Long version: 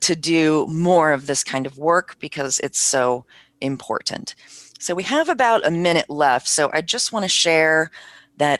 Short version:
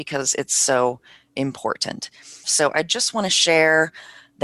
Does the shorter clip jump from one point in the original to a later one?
yes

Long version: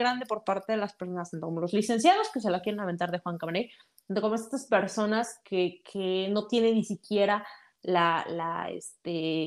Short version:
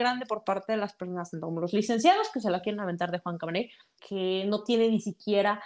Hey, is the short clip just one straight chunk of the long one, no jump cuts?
no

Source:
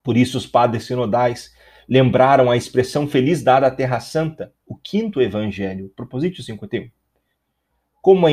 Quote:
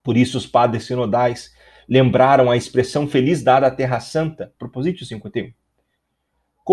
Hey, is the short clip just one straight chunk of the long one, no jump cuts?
no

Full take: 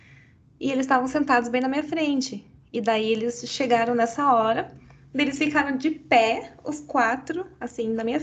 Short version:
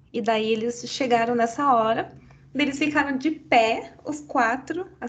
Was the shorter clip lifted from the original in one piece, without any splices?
yes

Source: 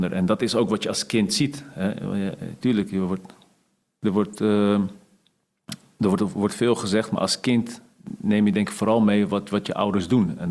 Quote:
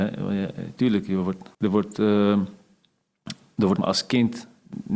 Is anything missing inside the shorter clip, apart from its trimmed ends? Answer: yes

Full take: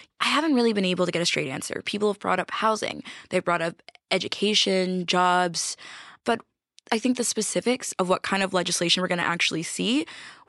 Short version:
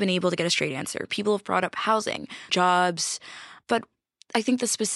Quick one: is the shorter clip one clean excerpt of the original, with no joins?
no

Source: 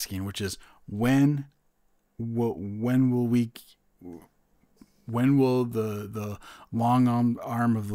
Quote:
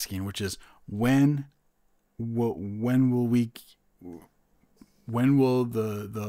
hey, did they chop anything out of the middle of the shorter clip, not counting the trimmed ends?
no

